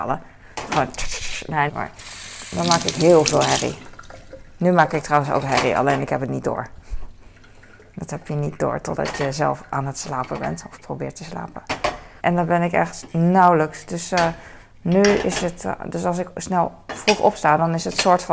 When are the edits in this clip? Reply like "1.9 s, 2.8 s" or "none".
1.7 s, 12.2 s